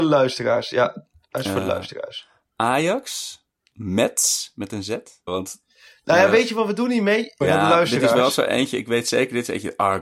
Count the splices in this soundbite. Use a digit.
3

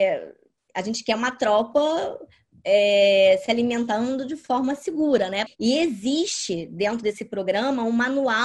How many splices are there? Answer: 1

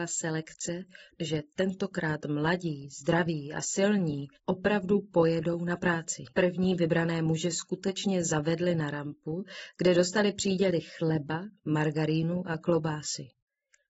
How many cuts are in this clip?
3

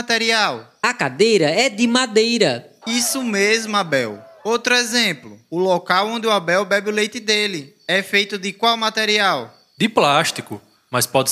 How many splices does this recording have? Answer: 1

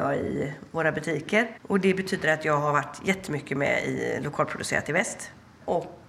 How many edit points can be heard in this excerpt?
1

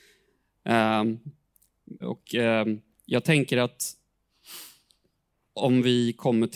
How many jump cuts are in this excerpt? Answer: 1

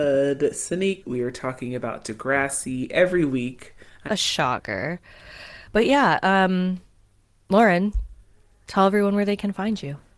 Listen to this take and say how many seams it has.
2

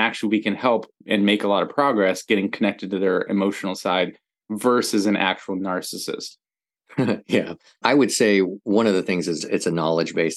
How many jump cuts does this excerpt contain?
2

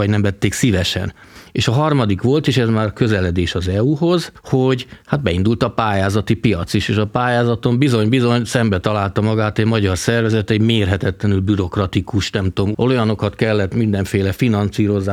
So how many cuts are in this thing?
1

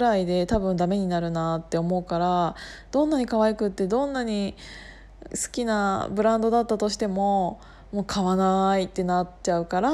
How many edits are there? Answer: 1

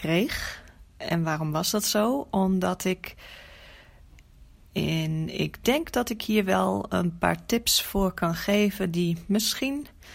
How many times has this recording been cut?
1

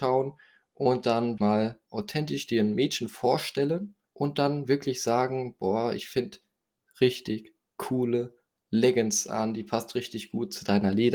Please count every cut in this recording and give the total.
3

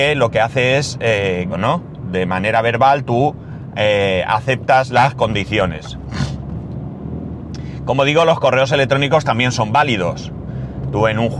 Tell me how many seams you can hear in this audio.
1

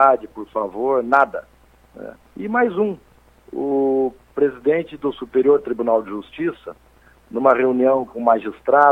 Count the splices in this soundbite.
1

